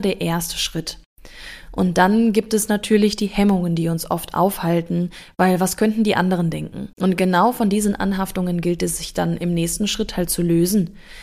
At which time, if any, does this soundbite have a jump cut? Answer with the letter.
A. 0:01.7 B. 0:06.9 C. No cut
B